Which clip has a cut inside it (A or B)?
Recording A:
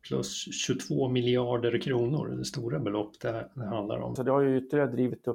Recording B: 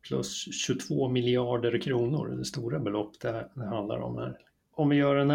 A